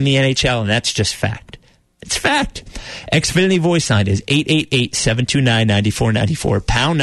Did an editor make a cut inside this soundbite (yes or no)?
no